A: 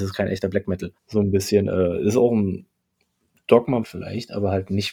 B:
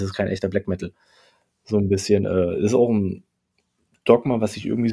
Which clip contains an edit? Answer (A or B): A